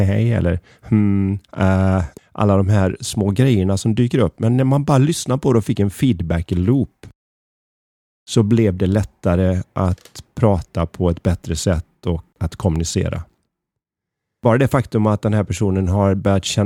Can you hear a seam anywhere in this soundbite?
yes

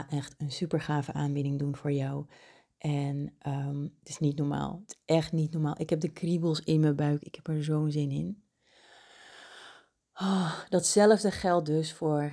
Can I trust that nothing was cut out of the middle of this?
yes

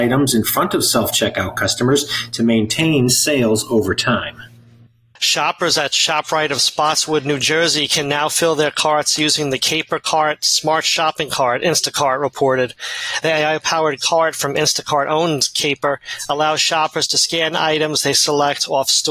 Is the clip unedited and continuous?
yes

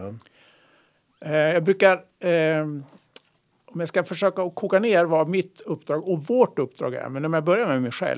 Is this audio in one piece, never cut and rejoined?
yes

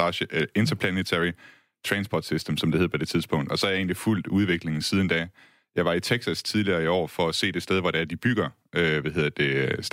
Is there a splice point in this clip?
no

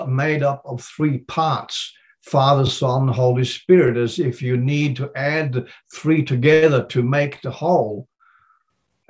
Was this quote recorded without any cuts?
yes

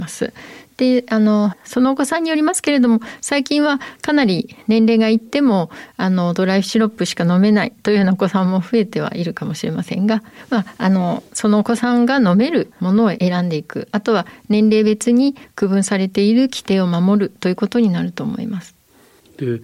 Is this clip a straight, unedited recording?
yes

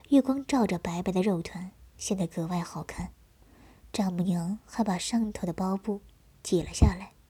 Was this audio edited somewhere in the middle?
no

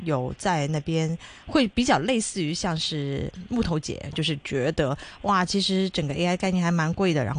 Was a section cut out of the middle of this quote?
yes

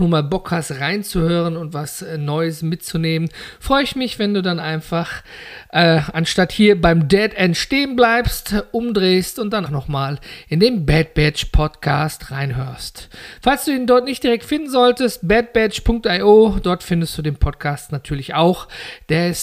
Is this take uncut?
no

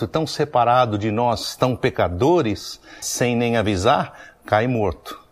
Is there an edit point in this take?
yes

